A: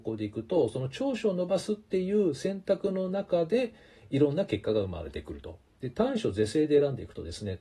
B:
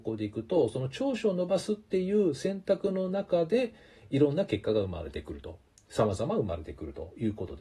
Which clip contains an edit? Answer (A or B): A